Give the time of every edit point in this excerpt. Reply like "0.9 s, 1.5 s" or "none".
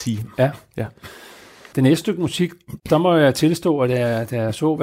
1.7 s, 2.8 s